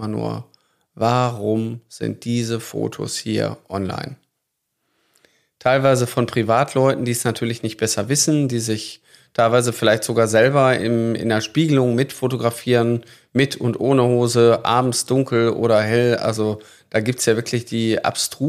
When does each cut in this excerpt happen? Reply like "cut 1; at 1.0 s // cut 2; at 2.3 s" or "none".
none

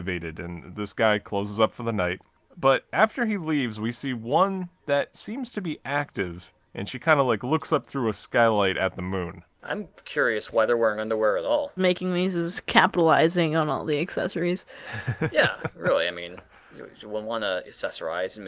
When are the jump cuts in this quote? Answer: cut 1; at 11.8 s

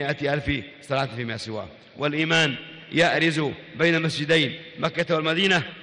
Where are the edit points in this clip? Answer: none

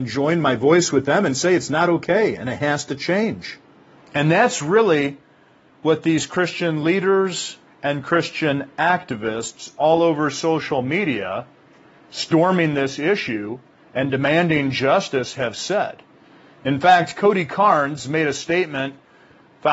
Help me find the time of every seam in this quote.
cut 1; at 4.0 s

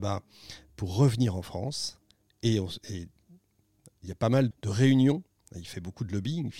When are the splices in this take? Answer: cut 1; at 4.5 s

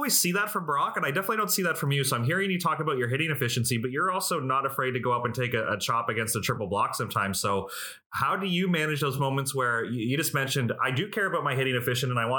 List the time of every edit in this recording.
none

